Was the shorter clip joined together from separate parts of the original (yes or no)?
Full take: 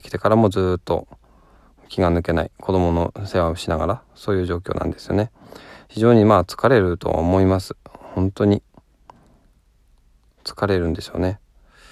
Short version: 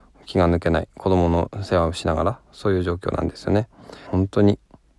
yes